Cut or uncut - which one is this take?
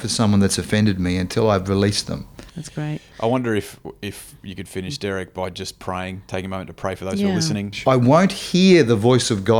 cut